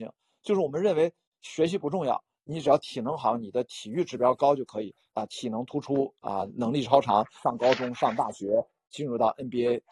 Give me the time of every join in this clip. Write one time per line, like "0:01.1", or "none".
0:05.1
0:07.4